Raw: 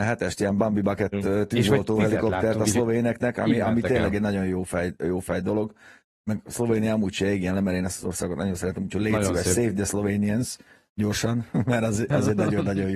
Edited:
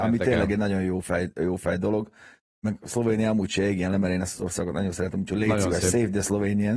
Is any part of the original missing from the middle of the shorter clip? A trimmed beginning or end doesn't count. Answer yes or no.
no